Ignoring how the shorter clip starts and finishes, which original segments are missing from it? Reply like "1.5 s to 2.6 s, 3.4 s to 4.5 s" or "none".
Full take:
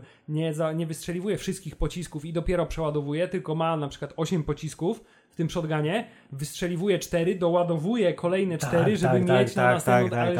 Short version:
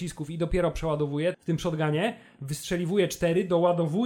3.3 s to 5.3 s